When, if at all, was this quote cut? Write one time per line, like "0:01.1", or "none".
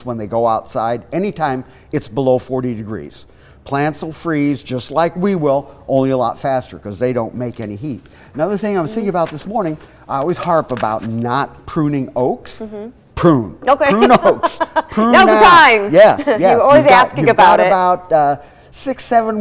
none